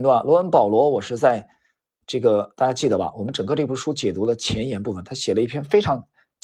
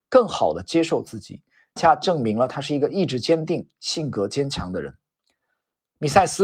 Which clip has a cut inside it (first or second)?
second